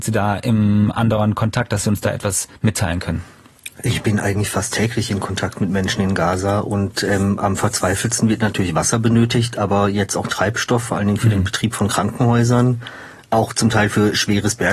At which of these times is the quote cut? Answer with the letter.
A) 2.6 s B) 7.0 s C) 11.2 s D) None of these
A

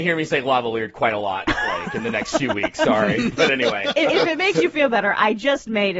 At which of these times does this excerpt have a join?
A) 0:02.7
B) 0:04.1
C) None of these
B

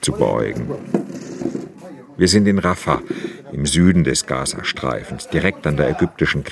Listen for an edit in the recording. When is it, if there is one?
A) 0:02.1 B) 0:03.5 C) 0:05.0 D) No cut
D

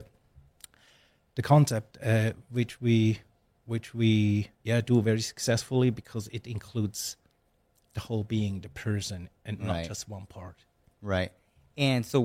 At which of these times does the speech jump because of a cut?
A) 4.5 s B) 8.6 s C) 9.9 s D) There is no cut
A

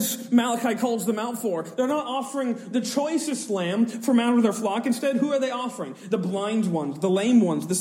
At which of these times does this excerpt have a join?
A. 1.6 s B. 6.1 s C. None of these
C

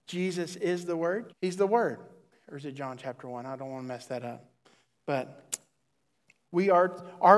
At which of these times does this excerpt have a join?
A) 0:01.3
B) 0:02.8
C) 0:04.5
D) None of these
A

